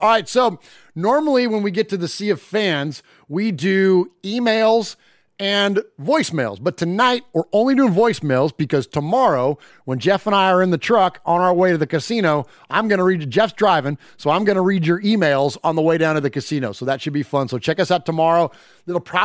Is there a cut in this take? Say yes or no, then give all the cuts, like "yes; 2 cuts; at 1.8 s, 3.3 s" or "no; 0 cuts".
no; 0 cuts